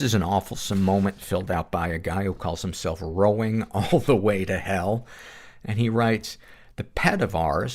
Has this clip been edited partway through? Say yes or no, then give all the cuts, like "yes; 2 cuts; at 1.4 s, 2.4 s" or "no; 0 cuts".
no; 0 cuts